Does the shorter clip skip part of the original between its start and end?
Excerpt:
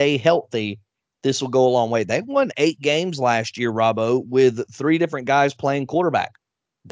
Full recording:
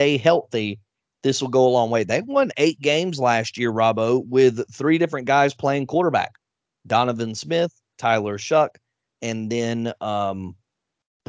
no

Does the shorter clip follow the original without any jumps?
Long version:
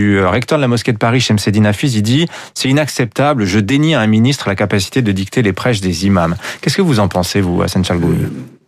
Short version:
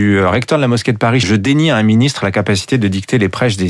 no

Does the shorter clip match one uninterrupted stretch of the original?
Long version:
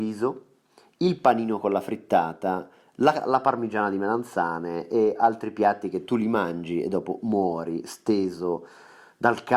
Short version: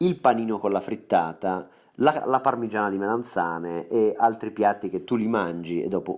yes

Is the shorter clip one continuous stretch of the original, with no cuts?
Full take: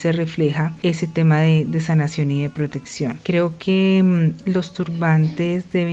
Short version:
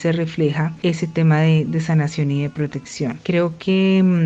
yes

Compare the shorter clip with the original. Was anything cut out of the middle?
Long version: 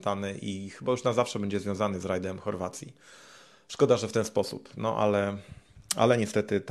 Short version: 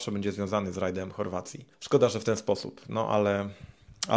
yes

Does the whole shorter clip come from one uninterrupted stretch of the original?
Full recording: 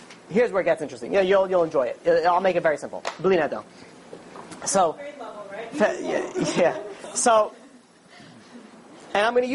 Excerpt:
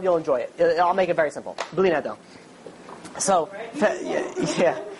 no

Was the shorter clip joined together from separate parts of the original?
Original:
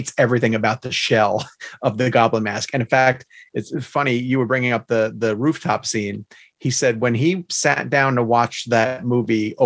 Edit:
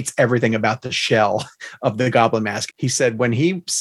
yes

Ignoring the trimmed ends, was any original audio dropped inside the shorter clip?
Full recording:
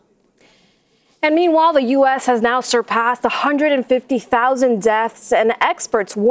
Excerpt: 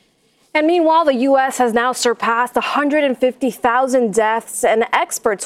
no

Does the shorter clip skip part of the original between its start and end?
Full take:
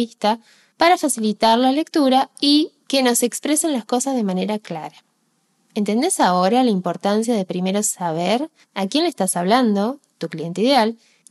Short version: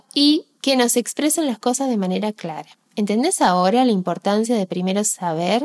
yes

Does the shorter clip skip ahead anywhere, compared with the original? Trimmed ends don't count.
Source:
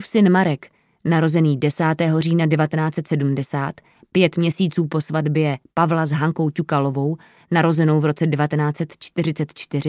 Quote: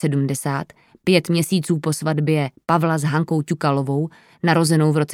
no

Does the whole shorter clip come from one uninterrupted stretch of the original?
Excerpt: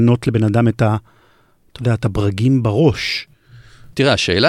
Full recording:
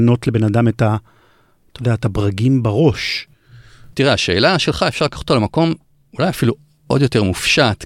yes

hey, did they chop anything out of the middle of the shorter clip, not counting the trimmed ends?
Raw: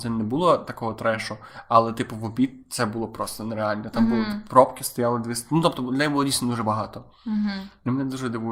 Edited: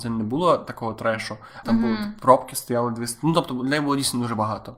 yes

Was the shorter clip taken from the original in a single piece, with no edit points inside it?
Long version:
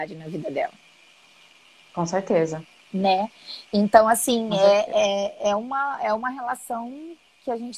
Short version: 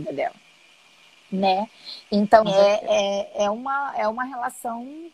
no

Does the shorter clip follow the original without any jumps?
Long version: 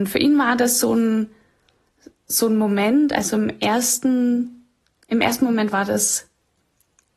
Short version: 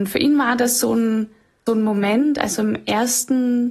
no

